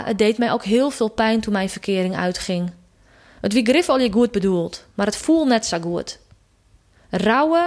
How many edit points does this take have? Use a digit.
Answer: 0